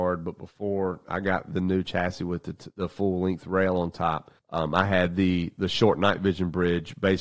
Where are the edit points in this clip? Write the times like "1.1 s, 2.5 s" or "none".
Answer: 4.4 s